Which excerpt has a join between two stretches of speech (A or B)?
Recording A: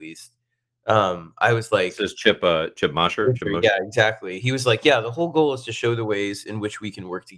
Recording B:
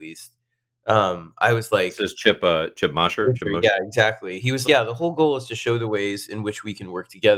B